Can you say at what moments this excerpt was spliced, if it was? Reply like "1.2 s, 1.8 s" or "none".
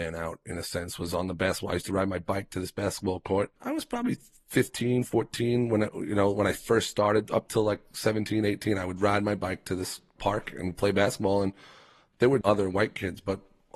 3.6 s, 12.4 s